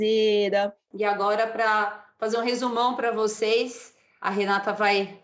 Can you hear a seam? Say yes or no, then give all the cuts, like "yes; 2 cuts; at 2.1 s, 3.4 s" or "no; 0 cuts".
yes; 1 cut; at 0.9 s